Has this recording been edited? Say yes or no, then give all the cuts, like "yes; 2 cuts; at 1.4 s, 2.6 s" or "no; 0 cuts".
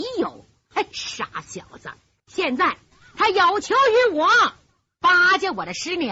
yes; 2 cuts; at 0.9 s, 2.2 s